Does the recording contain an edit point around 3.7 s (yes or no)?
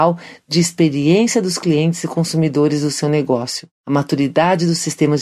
yes